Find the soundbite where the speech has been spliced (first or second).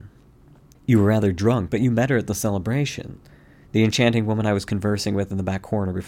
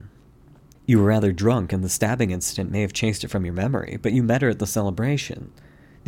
first